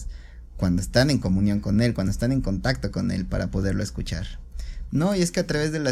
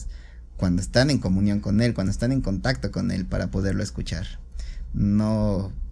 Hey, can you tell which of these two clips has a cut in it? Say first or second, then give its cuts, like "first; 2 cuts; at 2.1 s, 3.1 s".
first; 1 cut; at 4.9 s